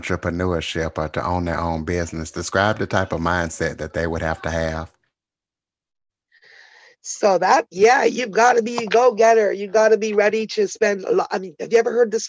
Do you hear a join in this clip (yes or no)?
no